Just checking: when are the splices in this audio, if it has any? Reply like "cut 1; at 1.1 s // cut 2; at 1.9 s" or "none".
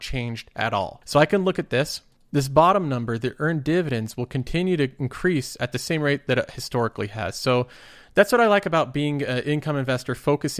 cut 1; at 1.0 s